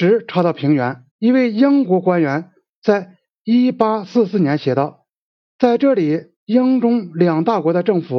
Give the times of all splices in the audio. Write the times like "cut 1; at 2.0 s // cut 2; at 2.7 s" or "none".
cut 1; at 1.1 s // cut 2; at 6.4 s